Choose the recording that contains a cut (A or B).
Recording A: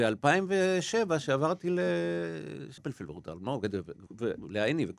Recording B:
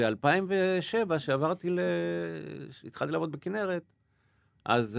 A